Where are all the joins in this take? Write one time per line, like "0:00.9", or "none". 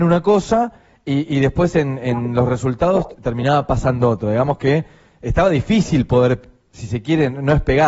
none